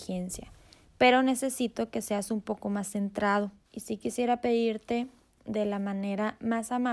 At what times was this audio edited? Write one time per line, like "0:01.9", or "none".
0:03.6